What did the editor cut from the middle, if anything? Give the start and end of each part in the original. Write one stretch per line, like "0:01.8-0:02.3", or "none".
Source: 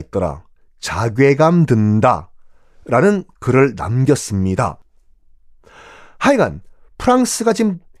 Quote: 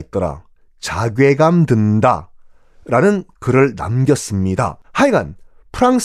0:04.8-0:06.1